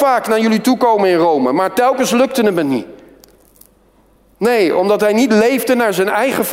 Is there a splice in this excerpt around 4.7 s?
no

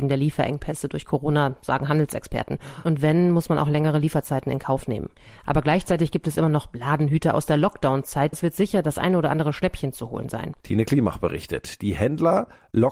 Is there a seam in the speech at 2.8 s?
no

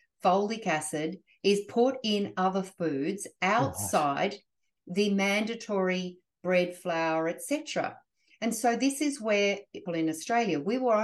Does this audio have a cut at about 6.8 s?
no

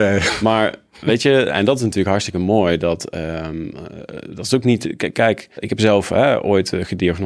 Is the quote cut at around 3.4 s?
no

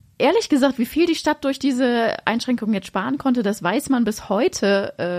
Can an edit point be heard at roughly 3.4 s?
no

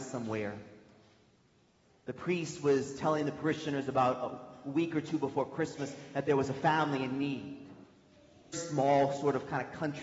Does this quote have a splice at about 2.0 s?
no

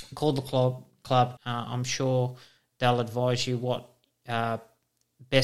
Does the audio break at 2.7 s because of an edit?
no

